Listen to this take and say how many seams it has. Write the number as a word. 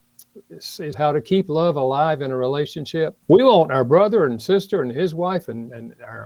two